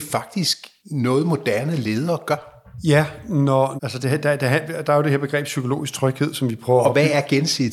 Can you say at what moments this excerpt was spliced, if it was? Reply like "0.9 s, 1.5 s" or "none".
3.8 s